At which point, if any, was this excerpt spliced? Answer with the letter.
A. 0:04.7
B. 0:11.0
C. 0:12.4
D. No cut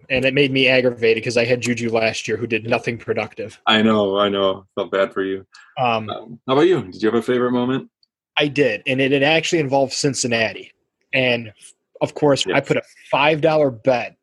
C